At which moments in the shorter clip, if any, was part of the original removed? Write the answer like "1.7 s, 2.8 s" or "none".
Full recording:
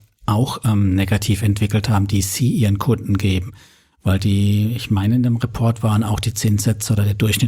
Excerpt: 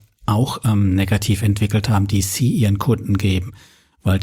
none